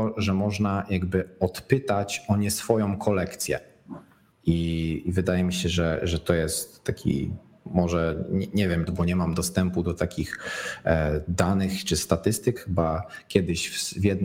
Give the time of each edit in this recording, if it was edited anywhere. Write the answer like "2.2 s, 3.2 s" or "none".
4.3 s, 8.9 s, 12.6 s